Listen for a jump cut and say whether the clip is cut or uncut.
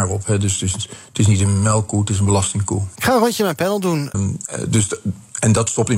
cut